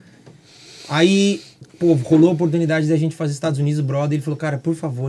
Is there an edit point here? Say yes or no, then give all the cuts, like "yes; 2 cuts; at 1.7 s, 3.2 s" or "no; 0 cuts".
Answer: no; 0 cuts